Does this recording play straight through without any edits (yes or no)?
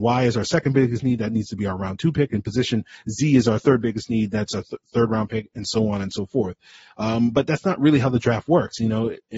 yes